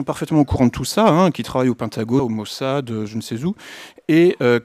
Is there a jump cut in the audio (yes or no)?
yes